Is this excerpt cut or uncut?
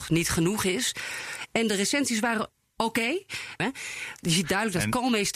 cut